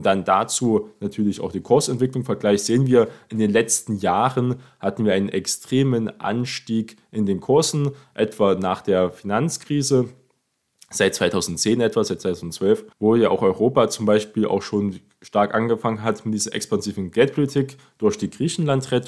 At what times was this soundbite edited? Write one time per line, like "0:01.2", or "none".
0:12.9